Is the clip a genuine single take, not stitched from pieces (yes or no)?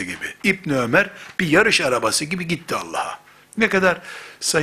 no